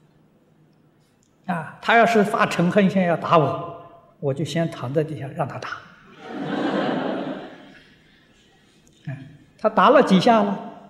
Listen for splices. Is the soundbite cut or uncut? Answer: uncut